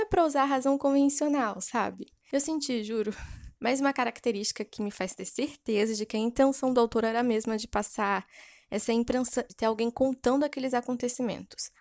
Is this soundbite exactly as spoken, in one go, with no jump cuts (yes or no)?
no